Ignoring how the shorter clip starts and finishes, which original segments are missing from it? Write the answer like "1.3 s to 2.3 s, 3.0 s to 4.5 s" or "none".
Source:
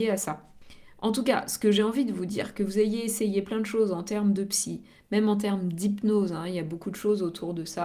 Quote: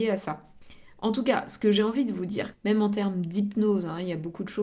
2.5 s to 5.0 s